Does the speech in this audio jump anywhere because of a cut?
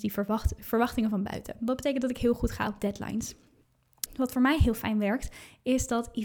yes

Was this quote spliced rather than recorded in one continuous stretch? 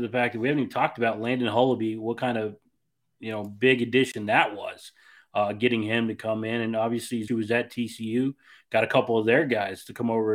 yes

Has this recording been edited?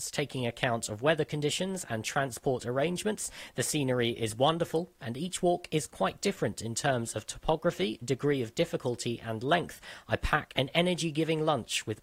no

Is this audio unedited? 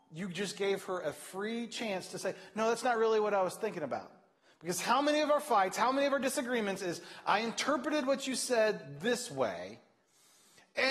yes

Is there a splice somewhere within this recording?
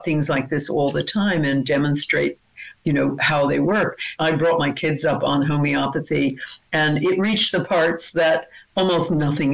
yes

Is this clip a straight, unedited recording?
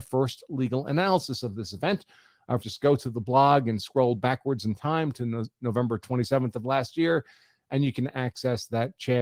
no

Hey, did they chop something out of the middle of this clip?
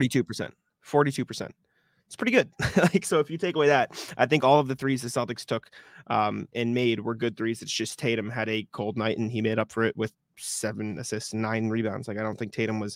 no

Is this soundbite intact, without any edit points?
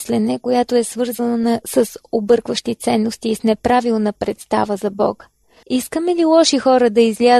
no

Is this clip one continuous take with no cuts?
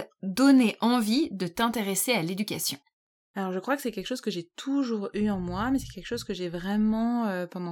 yes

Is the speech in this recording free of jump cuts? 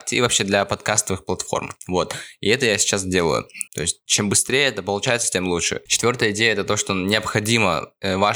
no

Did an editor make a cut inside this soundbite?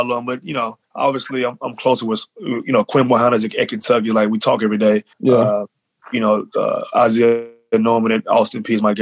no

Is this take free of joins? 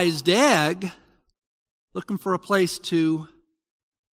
yes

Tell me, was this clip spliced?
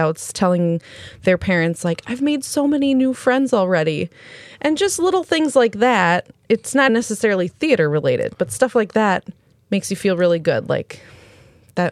yes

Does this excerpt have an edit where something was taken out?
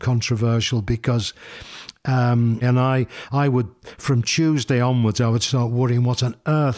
yes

